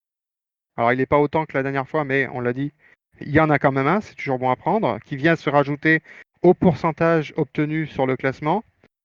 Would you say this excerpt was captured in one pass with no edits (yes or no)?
yes